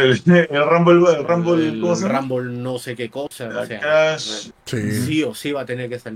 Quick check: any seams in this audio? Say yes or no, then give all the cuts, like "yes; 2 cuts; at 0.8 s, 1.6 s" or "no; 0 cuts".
yes; 1 cut; at 4.5 s